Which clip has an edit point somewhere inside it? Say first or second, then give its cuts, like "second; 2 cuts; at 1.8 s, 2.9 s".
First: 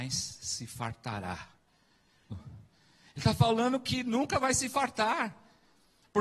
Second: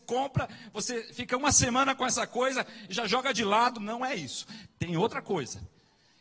first; 1 cut; at 2.3 s